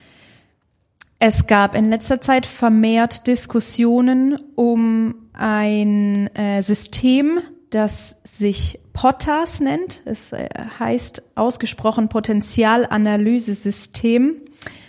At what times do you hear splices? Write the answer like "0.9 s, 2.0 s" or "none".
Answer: none